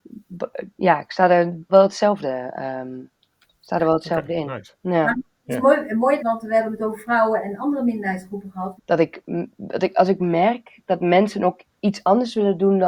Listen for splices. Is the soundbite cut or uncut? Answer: cut